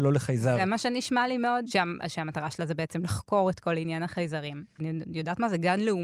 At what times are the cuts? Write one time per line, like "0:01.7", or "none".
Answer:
0:01.6
0:04.8